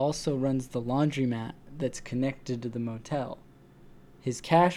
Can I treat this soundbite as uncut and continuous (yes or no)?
yes